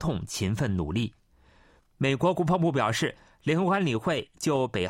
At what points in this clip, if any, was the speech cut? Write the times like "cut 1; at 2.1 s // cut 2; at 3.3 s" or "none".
cut 1; at 1.8 s